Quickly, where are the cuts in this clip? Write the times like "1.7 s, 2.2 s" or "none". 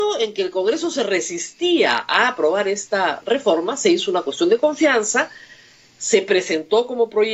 none